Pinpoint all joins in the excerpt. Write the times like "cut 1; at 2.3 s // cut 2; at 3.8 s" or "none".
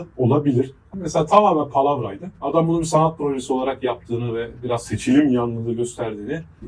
cut 1; at 0.9 s